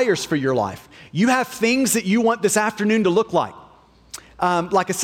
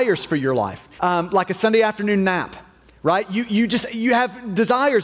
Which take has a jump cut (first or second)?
second